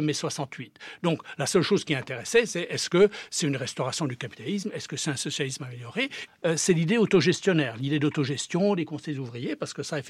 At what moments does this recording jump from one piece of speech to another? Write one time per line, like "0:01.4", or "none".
0:06.3